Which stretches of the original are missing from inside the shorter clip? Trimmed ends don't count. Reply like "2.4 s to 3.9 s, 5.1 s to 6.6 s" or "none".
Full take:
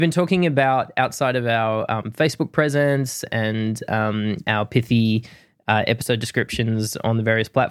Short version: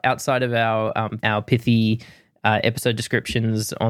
2.1 s to 4.4 s